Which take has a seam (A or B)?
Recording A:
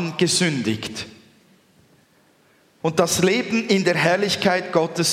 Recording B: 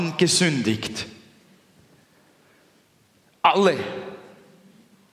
A